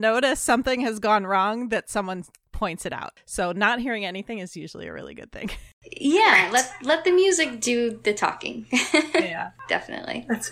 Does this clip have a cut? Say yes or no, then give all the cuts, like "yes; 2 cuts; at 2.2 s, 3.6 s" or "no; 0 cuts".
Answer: no; 0 cuts